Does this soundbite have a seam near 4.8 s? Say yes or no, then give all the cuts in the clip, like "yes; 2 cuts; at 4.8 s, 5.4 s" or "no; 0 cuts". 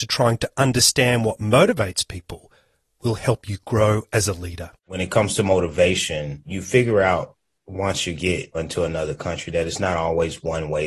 yes; 1 cut; at 4.8 s